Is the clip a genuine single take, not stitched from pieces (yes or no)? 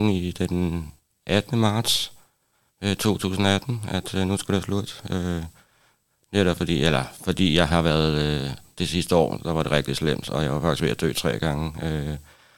yes